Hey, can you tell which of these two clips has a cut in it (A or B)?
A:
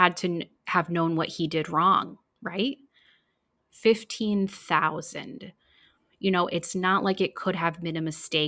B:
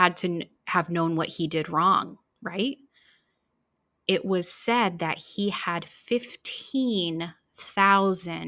A